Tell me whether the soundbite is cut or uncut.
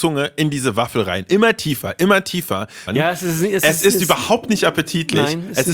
cut